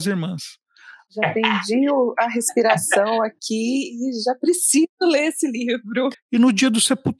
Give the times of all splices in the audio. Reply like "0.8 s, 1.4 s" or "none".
1.0 s, 6.1 s